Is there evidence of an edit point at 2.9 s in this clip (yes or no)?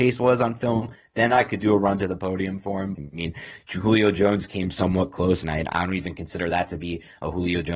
yes